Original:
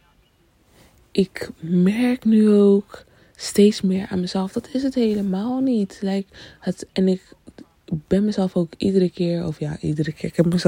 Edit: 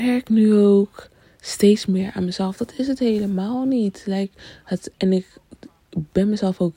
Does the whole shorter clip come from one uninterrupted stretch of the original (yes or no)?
yes